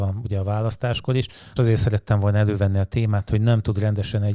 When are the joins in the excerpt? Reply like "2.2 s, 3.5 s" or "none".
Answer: 1.6 s, 3.3 s